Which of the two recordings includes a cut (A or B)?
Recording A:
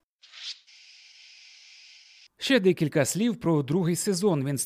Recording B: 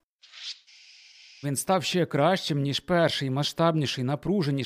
B